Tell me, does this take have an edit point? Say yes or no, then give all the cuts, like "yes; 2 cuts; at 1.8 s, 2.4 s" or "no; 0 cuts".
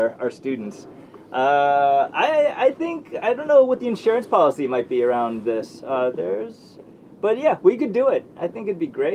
no; 0 cuts